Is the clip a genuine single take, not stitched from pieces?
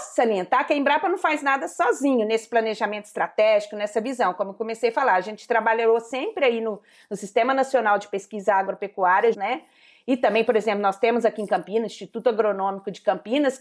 no; 1 cut; at 9.3 s

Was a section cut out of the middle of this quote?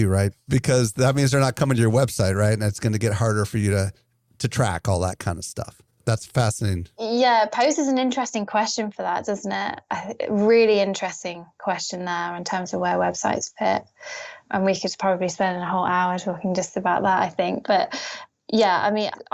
no; 0 cuts

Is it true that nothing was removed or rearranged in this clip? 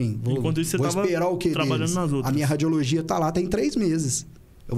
yes; 0 cuts

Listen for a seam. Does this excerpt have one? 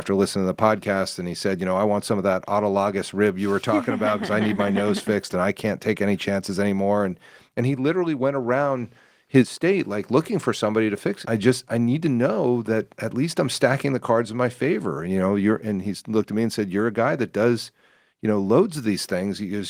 yes; 1 cut; at 11.2 s

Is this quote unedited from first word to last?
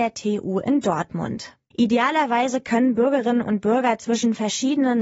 no; 1 cut; at 1.7 s

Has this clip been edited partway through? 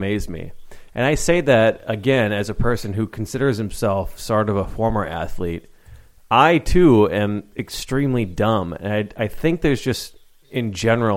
no; 0 cuts

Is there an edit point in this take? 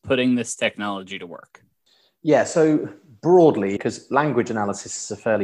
yes; 1 cut; at 3.8 s

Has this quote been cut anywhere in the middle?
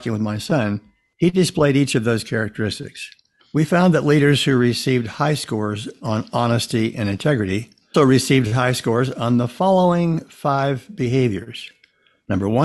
yes; 2 cuts; at 3.4 s, 7.9 s

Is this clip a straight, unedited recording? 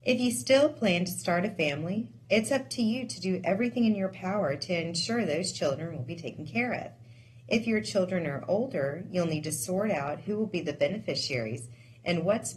no; 1 cut; at 2.2 s

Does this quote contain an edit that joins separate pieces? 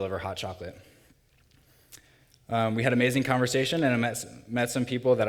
no; 0 cuts

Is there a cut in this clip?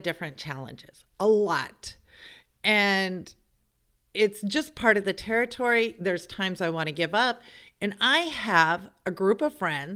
no; 0 cuts

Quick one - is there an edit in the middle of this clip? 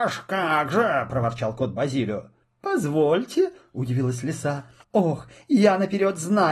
yes; 2 cuts; at 2.4 s, 4.8 s

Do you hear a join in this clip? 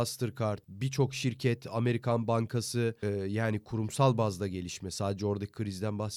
yes; 1 cut; at 3.0 s

